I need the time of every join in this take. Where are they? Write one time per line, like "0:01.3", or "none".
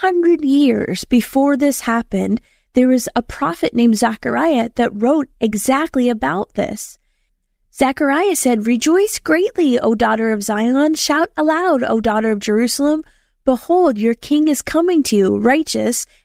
none